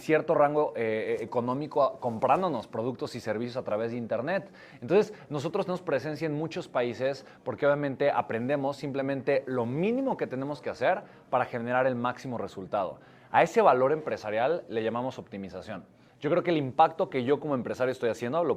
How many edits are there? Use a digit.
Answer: 1